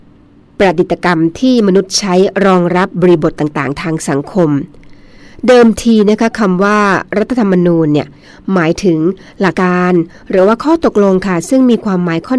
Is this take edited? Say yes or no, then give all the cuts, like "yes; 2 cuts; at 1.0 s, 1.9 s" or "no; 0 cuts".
yes; 1 cut; at 9.5 s